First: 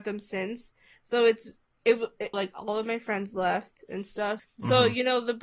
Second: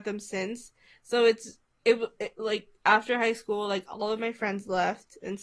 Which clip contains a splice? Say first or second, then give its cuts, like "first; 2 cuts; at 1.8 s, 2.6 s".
first; 2 cuts; at 2.3 s, 4.4 s